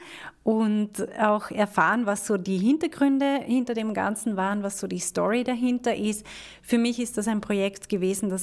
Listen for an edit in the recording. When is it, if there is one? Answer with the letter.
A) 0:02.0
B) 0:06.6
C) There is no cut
C